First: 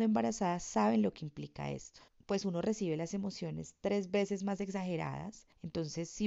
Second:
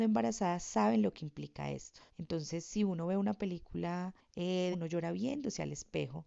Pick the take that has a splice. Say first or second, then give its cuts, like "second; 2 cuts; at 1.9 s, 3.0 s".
second; 2 cuts; at 2.1 s, 4.7 s